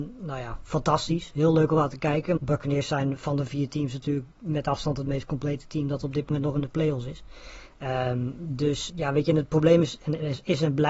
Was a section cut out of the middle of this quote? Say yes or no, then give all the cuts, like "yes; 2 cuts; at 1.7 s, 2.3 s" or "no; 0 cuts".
yes; 2 cuts; at 2.4 s, 8.9 s